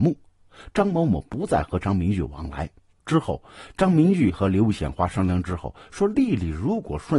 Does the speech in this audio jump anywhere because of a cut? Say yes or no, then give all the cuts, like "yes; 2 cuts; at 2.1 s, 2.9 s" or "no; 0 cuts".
yes; 1 cut; at 2.9 s